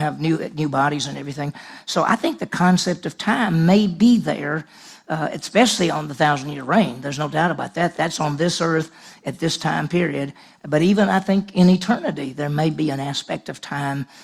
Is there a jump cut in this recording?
no; 0 cuts

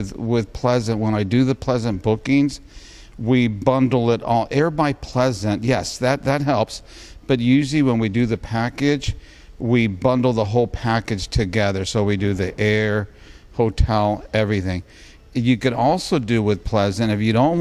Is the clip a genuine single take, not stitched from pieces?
yes; 0 cuts

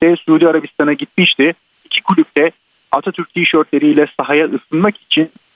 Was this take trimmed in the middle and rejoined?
yes; 1 cut; at 1.8 s

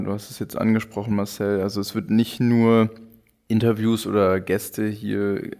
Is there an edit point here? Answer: no; 0 cuts

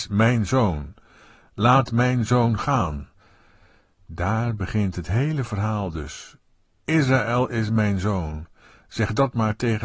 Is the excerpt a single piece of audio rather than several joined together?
yes; 0 cuts

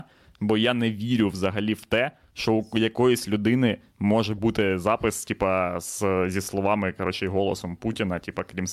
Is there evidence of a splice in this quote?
no; 0 cuts

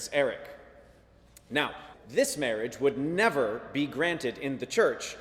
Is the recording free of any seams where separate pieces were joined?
no; 1 cut; at 1.9 s

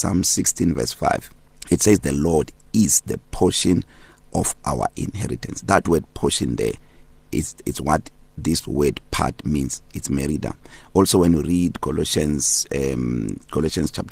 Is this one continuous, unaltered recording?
yes; 0 cuts

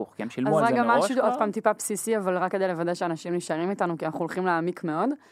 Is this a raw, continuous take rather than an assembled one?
yes; 0 cuts

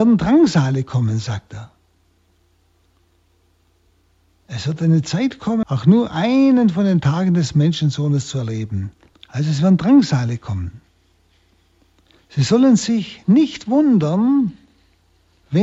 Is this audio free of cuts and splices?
no; 2 cuts; at 5.6 s, 9.1 s

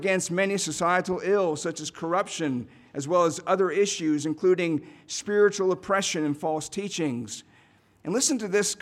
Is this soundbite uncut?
yes; 0 cuts

